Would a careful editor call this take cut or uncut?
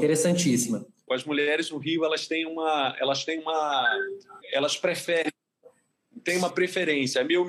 cut